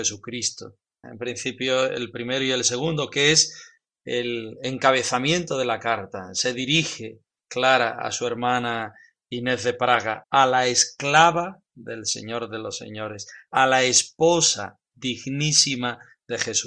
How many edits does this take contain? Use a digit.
2